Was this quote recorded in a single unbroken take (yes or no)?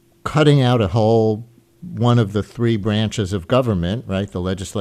yes